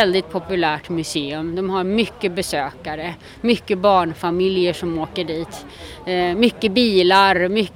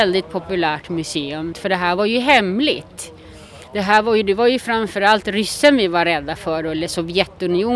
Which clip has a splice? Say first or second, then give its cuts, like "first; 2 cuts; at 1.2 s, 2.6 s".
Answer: second; 1 cut; at 1.5 s